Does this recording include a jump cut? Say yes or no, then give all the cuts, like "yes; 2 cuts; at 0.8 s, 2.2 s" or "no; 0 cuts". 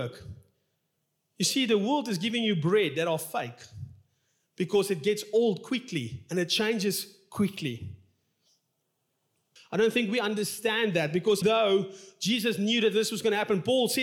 yes; 2 cuts; at 9.6 s, 11.4 s